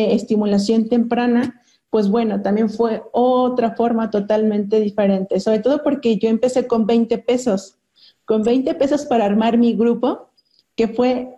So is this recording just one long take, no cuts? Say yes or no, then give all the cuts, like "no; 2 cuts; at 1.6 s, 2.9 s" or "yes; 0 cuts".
yes; 0 cuts